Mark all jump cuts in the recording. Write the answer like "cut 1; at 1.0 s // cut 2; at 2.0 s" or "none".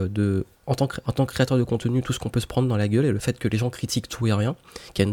cut 1; at 1.0 s